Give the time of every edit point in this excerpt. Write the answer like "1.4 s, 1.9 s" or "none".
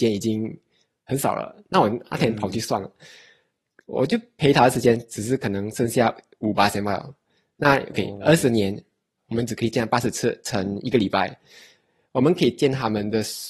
9.2 s